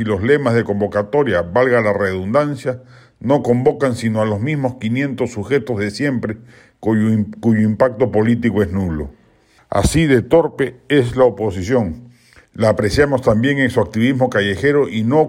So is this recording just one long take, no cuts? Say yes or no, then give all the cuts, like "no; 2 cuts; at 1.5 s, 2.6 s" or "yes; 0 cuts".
no; 2 cuts; at 9.6 s, 12.4 s